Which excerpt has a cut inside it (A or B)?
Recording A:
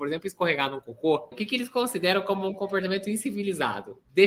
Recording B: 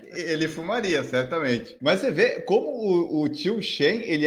A